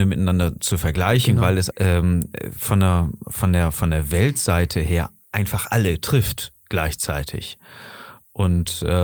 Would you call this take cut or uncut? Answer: cut